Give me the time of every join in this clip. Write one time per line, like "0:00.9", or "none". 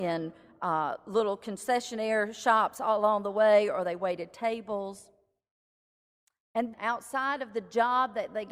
0:06.7